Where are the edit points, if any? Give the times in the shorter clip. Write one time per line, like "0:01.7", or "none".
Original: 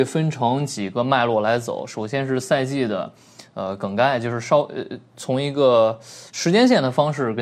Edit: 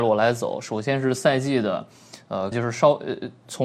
0:02.5